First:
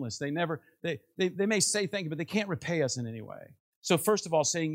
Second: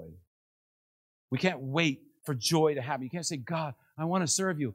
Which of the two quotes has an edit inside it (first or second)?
first